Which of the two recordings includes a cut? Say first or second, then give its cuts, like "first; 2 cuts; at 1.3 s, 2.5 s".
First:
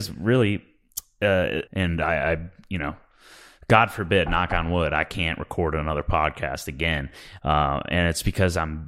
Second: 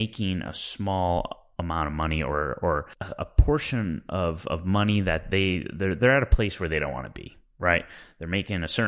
first; 2 cuts; at 1.7 s, 7.4 s